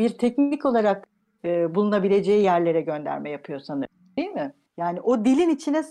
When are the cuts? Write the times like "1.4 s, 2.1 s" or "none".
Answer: 4.7 s